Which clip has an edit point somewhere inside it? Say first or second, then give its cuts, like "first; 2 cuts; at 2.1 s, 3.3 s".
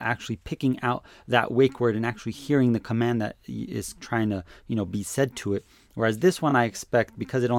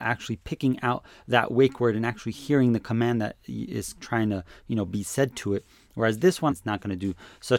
second; 1 cut; at 6.5 s